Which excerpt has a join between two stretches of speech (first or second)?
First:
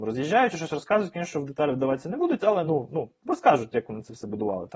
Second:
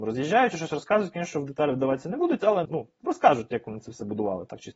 second